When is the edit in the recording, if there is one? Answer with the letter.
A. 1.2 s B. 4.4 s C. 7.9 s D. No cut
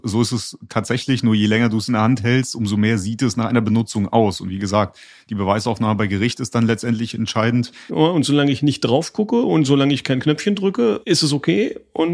C